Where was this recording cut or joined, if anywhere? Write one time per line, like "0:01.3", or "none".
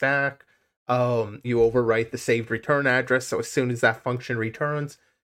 0:01.4